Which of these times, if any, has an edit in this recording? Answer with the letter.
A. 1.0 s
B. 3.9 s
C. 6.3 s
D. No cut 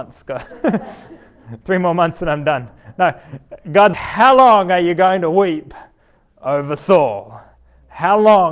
B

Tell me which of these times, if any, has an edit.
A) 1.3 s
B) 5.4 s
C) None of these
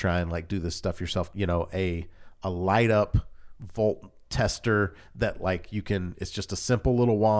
A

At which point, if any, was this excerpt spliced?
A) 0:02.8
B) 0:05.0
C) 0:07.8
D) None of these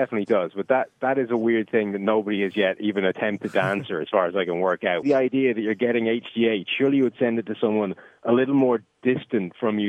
B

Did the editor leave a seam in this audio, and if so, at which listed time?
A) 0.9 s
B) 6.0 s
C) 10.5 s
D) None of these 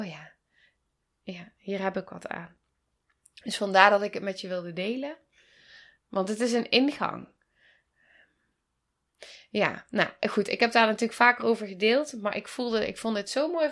B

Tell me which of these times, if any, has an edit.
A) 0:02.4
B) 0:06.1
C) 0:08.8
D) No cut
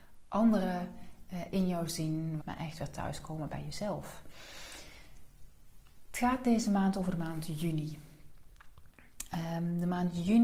A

